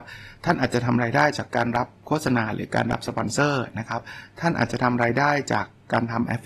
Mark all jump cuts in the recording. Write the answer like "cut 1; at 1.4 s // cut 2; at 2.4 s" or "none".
cut 1; at 1.5 s